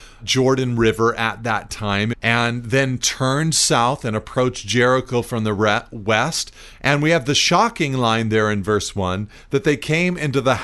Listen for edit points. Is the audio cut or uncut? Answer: cut